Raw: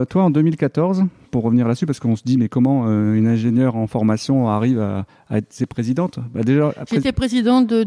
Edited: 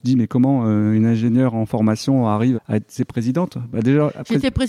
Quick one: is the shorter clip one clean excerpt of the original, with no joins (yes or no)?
no